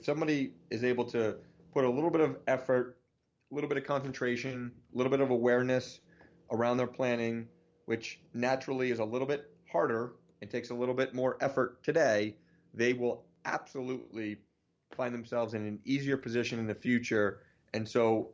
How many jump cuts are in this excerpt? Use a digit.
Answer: 0